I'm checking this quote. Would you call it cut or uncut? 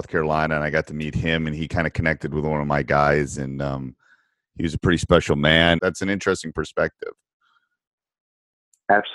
cut